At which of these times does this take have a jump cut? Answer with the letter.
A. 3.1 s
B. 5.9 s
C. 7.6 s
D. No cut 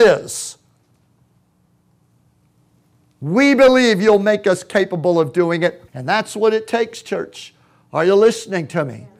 B